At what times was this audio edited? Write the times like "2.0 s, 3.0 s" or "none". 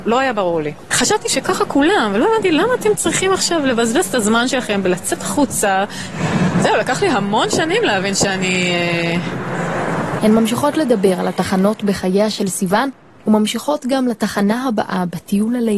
10.2 s